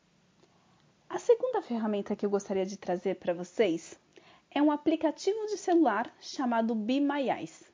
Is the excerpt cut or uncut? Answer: uncut